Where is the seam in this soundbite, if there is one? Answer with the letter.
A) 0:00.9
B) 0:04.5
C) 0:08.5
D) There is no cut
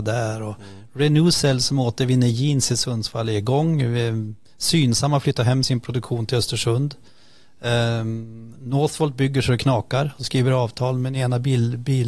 D